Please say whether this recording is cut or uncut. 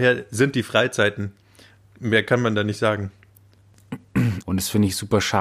cut